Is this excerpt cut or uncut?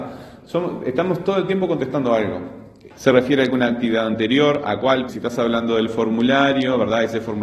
cut